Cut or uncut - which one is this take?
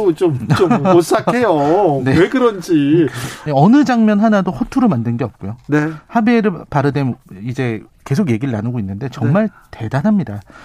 cut